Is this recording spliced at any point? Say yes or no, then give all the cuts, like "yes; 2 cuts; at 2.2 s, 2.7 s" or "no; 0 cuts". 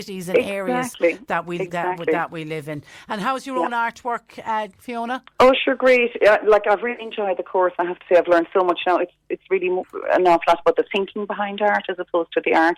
yes; 1 cut; at 4.7 s